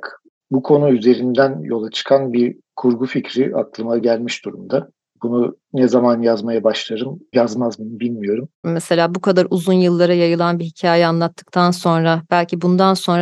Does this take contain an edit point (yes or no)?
yes